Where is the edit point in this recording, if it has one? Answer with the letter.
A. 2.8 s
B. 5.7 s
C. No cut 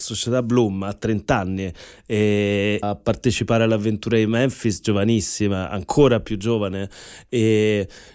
A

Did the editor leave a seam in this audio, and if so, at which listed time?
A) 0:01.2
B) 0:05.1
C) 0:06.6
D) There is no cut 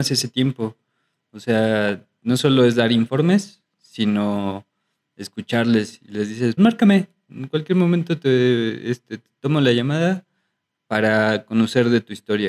C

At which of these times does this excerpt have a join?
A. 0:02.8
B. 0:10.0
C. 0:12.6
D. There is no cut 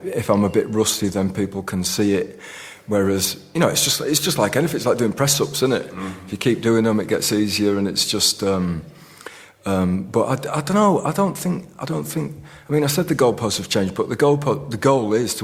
D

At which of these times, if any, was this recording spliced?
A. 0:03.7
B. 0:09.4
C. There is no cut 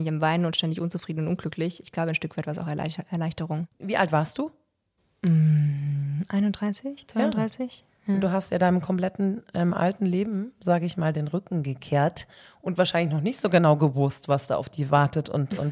A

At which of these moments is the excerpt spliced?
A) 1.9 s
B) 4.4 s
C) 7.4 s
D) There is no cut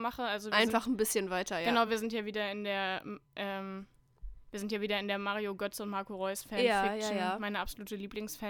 D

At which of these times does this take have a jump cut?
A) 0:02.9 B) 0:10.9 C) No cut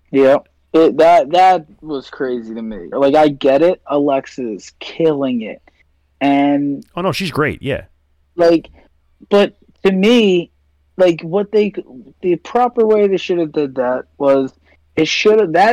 A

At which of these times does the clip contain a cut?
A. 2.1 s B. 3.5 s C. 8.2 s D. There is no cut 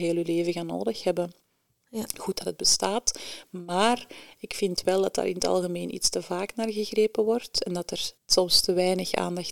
C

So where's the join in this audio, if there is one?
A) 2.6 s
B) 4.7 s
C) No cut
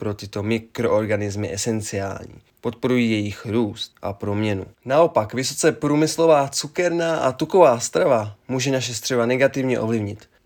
B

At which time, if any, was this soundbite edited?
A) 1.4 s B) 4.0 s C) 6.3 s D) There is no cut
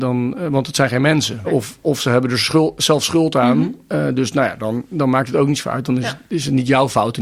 A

